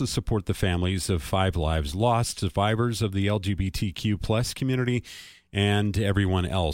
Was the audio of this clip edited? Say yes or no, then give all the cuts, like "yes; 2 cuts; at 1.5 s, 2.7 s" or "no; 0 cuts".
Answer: no; 0 cuts